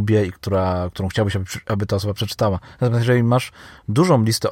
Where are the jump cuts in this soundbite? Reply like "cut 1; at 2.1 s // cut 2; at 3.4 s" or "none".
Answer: none